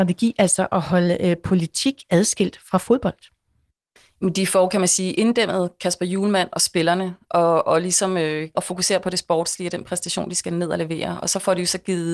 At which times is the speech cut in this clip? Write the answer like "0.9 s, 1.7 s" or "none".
8.5 s